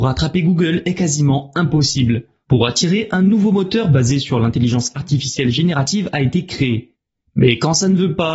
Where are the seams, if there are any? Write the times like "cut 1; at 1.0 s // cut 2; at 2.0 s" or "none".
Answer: cut 1; at 2.4 s